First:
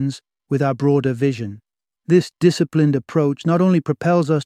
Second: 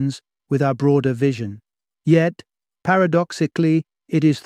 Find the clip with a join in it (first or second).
second